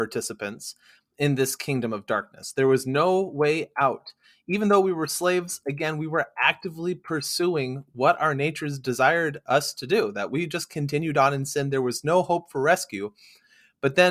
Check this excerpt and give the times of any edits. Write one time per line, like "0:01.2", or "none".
none